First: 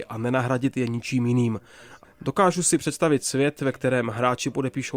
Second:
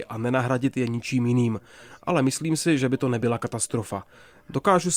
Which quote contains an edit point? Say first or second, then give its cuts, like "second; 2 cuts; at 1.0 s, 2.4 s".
first; 1 cut; at 2.0 s